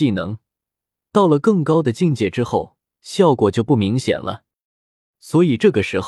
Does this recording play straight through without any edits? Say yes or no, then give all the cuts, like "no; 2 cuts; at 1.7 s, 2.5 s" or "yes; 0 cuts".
yes; 0 cuts